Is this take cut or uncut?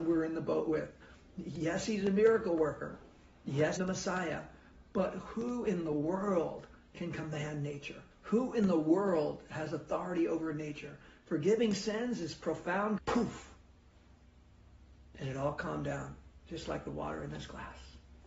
cut